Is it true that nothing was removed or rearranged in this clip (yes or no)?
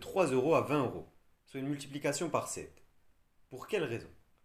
yes